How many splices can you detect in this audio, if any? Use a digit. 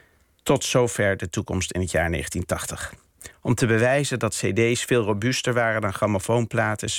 1